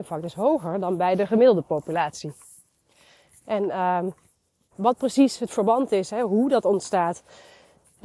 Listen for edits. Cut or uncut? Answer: cut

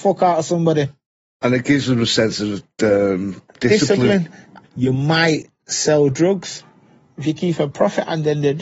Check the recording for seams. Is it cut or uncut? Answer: cut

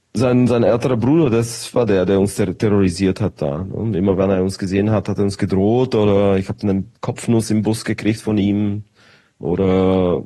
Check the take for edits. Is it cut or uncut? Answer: uncut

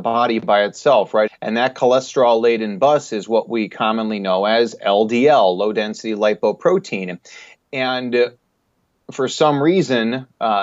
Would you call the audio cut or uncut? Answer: cut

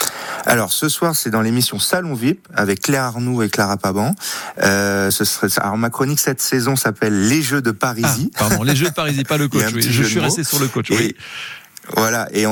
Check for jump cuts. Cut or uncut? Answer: uncut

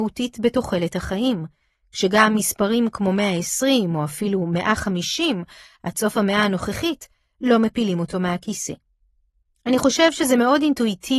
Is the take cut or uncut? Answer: uncut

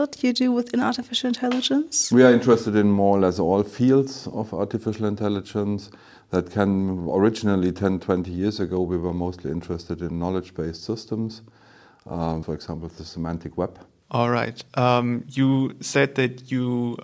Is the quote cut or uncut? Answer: cut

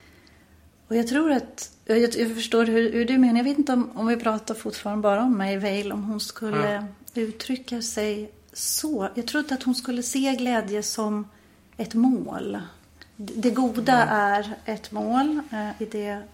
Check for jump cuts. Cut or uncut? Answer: uncut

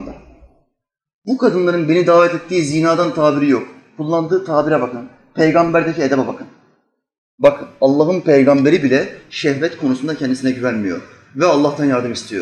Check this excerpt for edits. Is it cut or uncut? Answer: cut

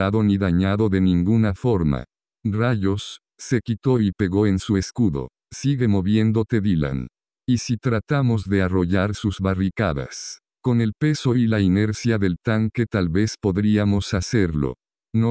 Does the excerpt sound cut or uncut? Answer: uncut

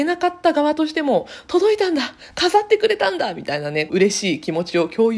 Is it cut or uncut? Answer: cut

